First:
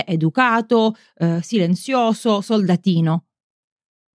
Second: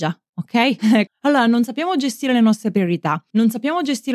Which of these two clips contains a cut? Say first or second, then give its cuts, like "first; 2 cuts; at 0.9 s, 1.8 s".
second; 1 cut; at 1.1 s